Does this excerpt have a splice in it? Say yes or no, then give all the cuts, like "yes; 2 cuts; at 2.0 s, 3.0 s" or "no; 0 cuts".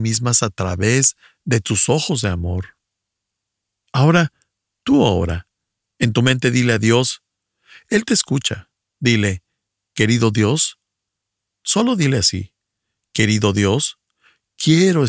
no; 0 cuts